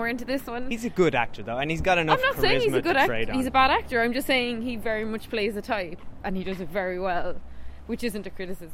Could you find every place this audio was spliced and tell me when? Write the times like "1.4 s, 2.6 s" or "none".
none